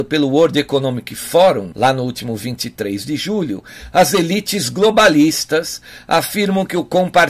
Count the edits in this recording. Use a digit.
1